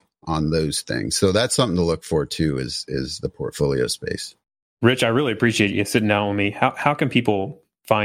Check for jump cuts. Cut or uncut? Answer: uncut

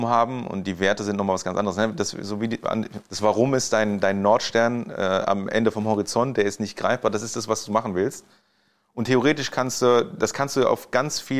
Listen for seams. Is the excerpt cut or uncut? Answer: cut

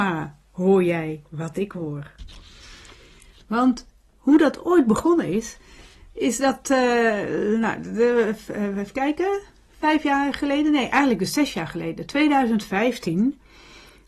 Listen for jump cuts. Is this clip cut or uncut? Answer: uncut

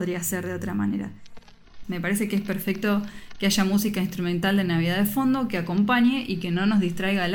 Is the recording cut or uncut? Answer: cut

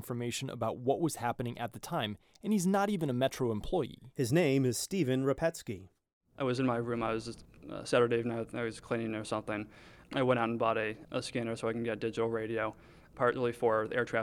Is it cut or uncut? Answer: uncut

